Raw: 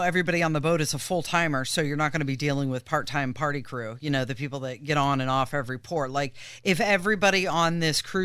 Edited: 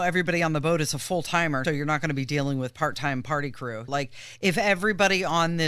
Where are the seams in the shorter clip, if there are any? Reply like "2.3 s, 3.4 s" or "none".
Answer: 1.6 s, 3.9 s

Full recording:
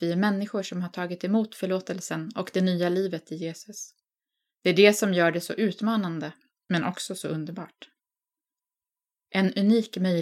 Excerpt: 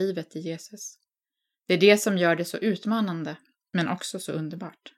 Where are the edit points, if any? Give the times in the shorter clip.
none

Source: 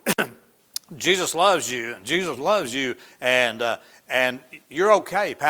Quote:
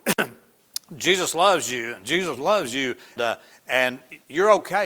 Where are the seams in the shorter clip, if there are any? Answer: 3.2 s

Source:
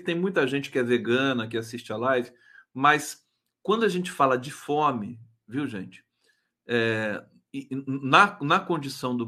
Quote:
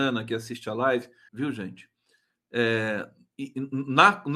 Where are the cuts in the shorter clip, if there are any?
1.3 s

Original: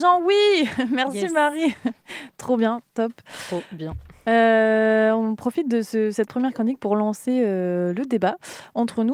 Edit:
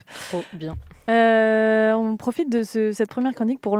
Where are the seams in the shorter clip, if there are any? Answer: none

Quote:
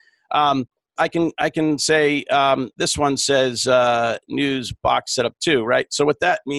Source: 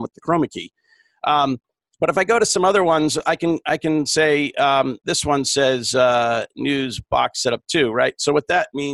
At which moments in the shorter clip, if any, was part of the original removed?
1.0 s

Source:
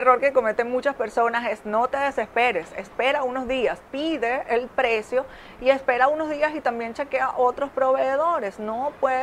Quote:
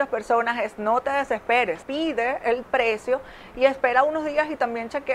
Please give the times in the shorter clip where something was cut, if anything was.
1.8 s

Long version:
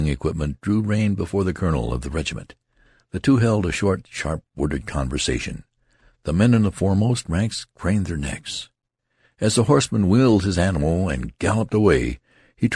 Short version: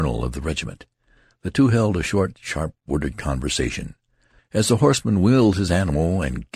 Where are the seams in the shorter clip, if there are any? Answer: 4.4 s

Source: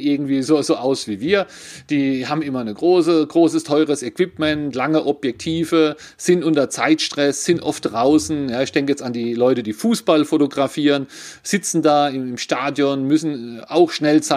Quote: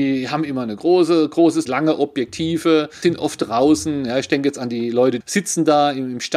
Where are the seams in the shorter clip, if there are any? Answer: 1.7 s, 3.0 s, 5.2 s

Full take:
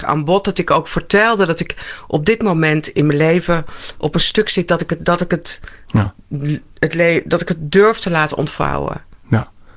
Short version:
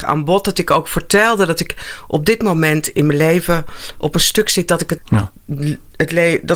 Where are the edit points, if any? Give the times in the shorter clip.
5.0 s

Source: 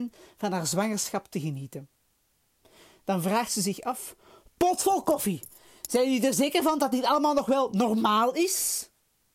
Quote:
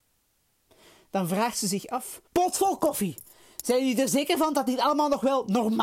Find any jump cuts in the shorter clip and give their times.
2.3 s

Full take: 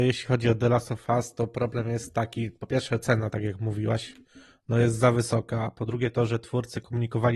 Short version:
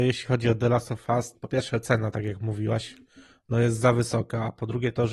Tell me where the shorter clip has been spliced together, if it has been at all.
1.3 s

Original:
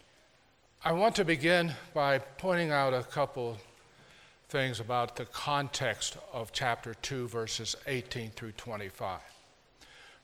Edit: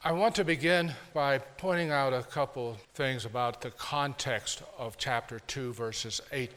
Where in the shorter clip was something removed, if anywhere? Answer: 2.8 s

